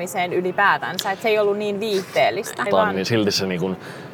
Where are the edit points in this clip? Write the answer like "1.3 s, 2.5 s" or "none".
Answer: 2.7 s